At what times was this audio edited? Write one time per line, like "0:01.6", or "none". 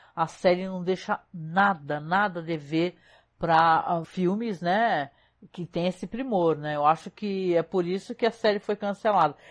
0:04.0